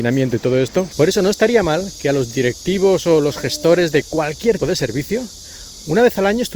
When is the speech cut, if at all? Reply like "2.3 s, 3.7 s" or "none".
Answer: 0.9 s, 4.6 s